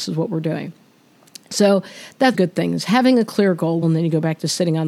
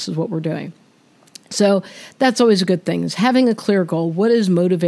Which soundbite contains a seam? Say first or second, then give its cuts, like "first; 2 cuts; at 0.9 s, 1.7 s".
first; 2 cuts; at 2.3 s, 3.8 s